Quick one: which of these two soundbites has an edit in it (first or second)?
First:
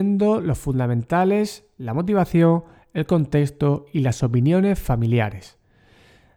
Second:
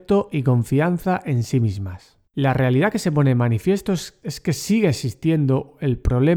second